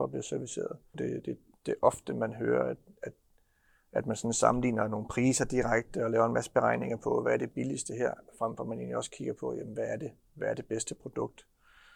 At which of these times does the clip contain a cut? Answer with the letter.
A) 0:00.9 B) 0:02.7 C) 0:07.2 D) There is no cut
A